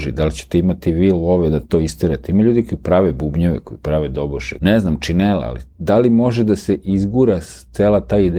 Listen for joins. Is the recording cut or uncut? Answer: cut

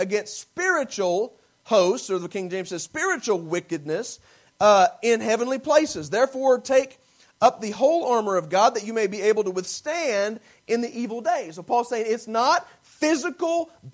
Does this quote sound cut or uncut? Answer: uncut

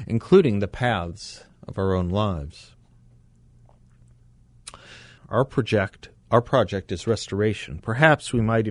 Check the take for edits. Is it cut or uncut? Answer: cut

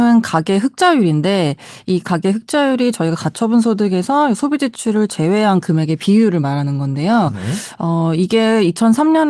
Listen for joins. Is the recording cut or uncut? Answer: uncut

